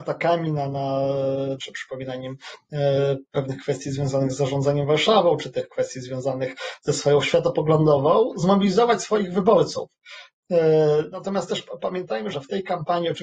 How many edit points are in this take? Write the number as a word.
two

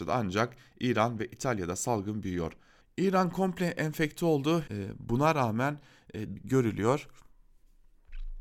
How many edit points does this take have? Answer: three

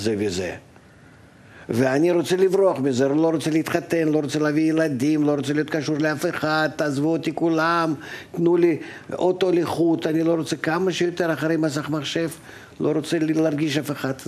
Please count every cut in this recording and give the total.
one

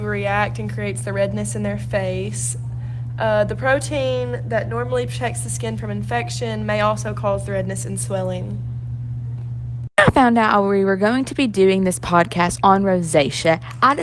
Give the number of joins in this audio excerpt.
zero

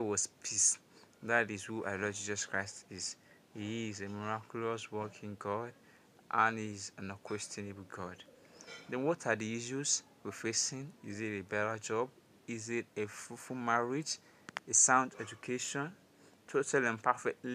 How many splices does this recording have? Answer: one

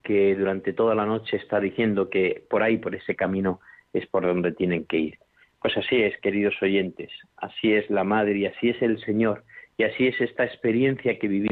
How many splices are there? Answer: zero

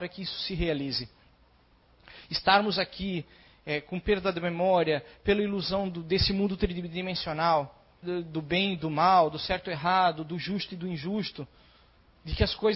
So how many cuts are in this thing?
one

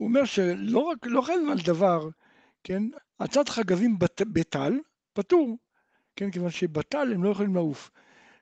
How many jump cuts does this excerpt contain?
one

